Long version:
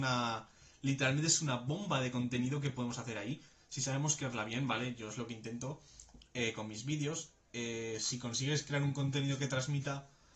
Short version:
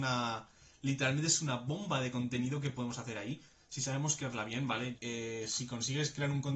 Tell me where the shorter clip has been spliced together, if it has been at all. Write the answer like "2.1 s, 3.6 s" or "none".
5.0 s